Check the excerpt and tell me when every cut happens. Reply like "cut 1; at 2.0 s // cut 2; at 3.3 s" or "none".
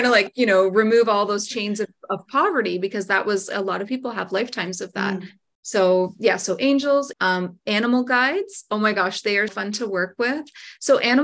cut 1; at 7.1 s // cut 2; at 9.5 s